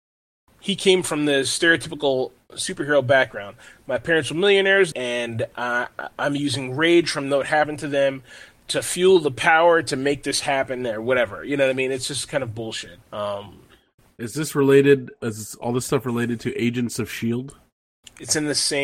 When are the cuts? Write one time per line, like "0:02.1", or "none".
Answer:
0:04.9
0:13.0